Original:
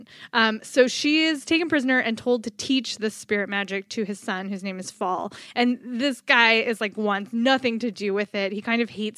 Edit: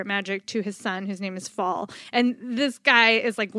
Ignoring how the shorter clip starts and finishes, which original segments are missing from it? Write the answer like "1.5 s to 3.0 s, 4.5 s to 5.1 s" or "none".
none